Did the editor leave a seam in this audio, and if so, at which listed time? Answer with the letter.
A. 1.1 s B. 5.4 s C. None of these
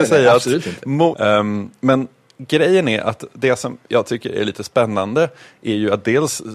A